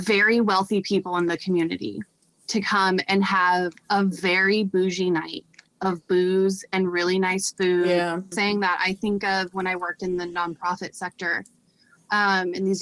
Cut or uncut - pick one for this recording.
cut